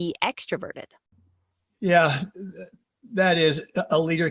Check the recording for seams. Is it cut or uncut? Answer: uncut